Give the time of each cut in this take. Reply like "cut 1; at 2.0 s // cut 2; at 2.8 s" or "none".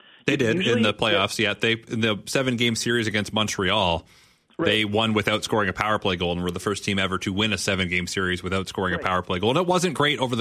none